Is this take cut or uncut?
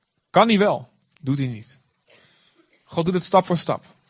uncut